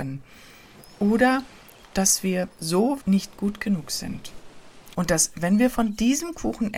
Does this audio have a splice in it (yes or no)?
yes